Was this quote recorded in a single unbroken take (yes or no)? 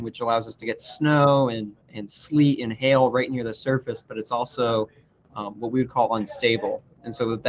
no